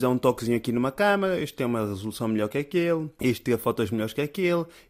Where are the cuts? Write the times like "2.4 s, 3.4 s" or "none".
none